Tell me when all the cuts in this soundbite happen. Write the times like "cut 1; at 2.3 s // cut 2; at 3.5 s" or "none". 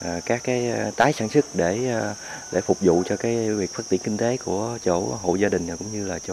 none